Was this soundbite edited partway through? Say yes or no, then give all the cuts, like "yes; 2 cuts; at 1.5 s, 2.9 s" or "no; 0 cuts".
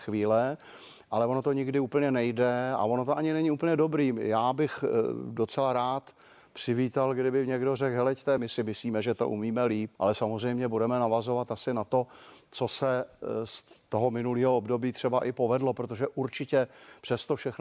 yes; 2 cuts; at 8.4 s, 10.0 s